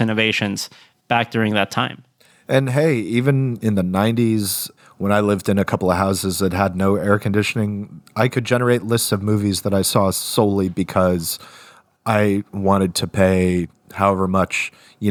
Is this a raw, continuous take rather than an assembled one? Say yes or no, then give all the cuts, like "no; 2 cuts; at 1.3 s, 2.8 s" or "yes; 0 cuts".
yes; 0 cuts